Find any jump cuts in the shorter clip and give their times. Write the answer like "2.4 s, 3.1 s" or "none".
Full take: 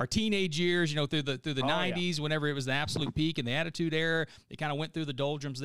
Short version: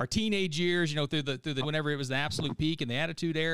1.6 s